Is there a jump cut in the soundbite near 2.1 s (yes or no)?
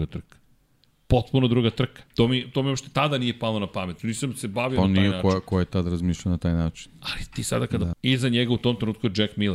yes